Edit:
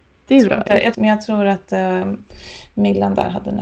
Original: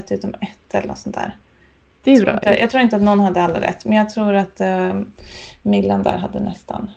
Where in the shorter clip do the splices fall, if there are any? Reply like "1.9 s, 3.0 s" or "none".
0.9 s